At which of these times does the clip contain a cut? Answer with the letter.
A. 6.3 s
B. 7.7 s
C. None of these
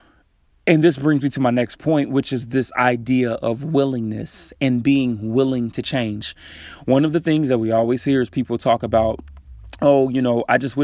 C